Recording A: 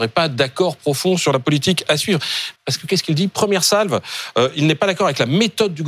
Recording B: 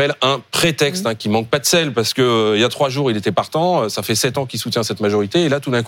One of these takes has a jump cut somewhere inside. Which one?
A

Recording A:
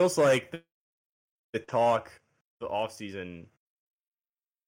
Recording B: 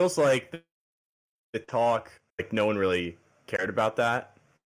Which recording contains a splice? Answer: B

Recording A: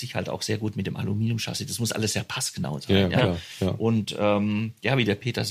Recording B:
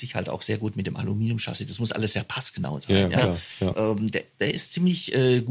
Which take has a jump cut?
B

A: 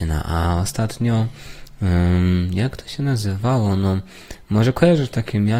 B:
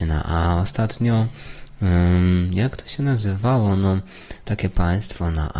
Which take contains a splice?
B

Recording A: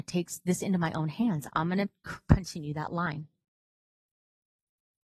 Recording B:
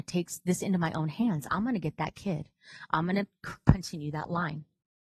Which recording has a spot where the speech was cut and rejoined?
A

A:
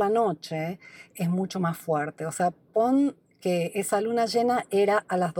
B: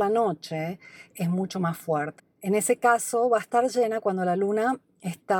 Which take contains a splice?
B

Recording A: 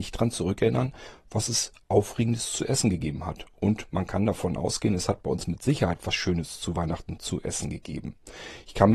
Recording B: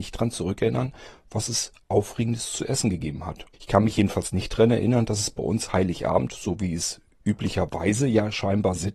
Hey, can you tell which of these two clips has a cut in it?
B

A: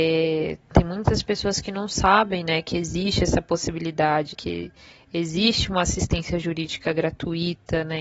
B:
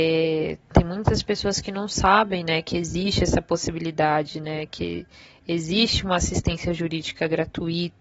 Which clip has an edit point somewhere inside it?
A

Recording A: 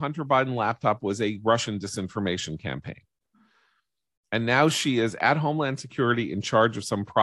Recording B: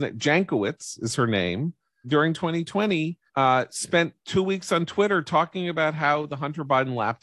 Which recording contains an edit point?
B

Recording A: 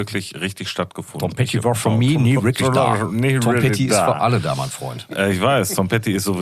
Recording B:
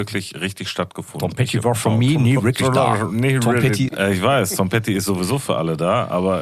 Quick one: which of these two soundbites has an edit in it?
B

